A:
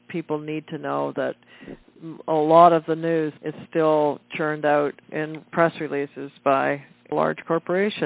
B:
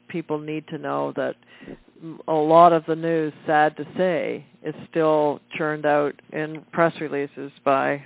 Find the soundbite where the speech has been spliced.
A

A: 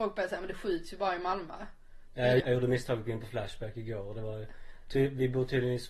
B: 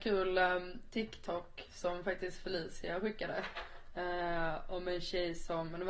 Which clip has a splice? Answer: A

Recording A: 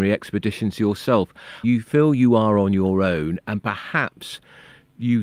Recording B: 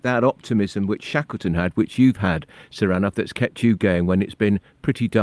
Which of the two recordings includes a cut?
A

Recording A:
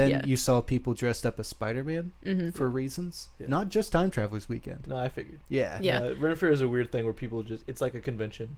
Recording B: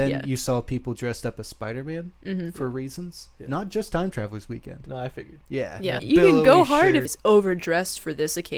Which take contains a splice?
B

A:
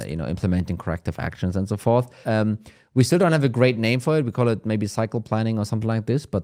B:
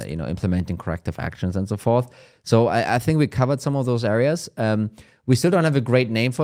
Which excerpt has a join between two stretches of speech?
A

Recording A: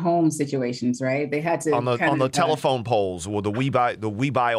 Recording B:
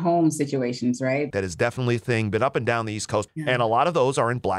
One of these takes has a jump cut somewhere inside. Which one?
B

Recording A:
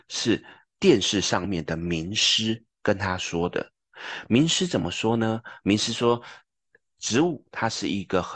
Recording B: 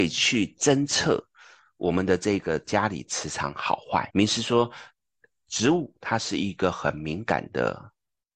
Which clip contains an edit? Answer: B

